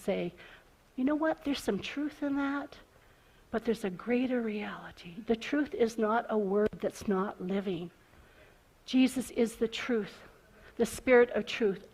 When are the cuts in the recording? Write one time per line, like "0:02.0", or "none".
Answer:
0:05.2